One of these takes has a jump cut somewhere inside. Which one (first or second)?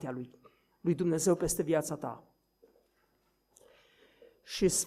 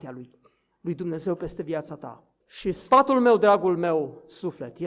second